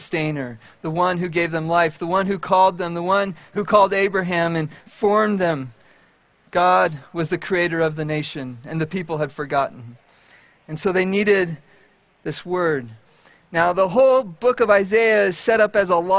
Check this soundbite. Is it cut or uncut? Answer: uncut